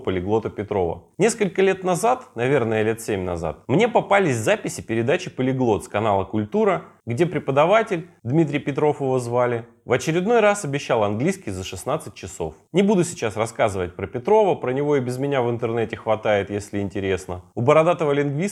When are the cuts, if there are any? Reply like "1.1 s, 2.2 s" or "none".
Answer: 1.1 s